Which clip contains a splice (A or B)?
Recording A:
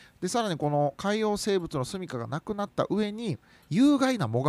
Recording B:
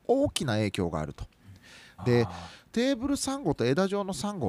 B